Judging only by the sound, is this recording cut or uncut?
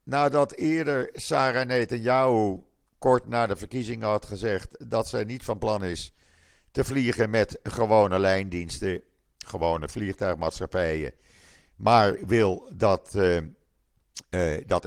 uncut